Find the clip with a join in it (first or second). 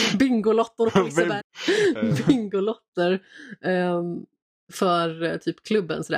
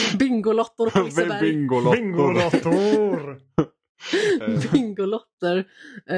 first